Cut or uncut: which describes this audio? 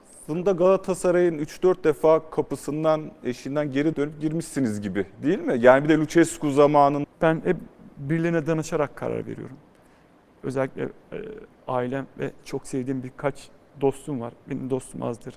cut